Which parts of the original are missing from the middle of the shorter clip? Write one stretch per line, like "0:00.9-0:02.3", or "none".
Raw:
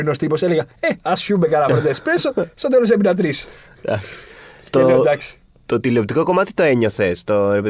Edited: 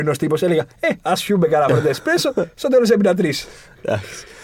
none